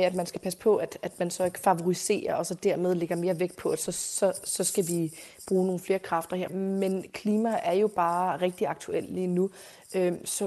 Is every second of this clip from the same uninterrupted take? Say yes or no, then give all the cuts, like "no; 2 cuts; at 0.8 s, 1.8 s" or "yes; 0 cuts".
no; 2 cuts; at 3.9 s, 6.5 s